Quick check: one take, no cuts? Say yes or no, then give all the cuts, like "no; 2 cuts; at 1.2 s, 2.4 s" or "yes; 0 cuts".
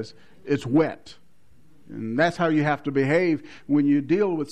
no; 1 cut; at 1.8 s